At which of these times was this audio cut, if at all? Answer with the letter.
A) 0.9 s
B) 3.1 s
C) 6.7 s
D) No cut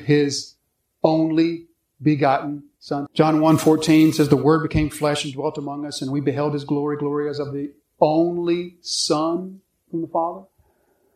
B